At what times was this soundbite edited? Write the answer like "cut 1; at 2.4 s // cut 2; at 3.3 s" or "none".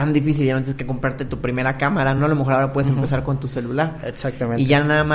none

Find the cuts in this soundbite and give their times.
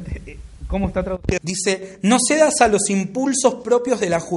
cut 1; at 1.4 s

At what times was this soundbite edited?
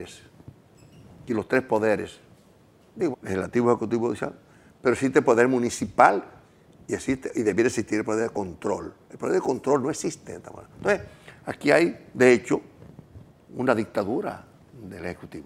cut 1; at 3.1 s

